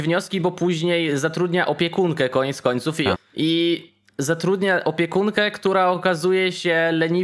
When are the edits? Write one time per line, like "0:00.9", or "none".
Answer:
0:03.1